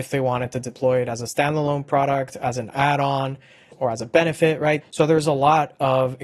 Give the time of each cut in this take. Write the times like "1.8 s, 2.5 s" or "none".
3.7 s, 4.8 s

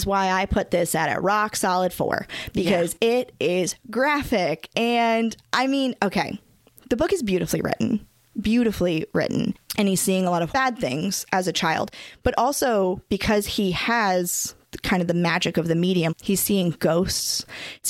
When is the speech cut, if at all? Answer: 9.6 s, 16.1 s

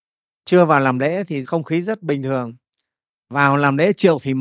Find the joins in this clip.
none

